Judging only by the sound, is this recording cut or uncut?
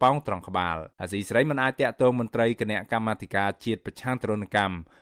cut